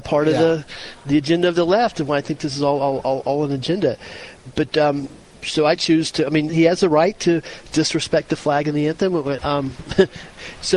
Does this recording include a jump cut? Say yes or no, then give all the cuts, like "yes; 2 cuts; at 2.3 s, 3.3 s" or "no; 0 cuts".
yes; 2 cuts; at 6.5 s, 9.4 s